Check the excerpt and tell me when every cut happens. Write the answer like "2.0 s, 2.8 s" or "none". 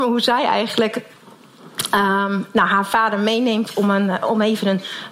none